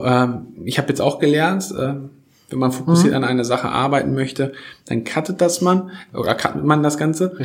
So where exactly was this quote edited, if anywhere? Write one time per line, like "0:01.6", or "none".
none